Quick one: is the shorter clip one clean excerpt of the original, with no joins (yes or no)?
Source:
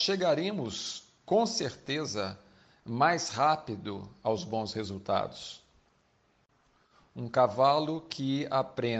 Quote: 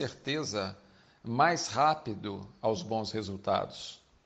yes